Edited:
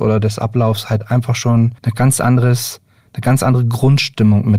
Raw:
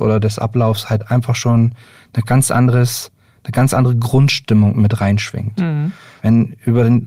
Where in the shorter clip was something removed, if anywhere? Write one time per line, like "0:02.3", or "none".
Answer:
0:01.8